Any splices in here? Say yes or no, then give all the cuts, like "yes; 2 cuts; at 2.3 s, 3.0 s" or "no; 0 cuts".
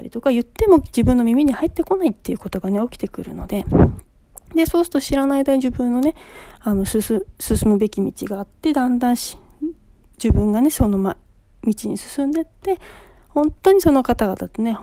no; 0 cuts